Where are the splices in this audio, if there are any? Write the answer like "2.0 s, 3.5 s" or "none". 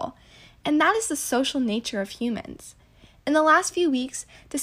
none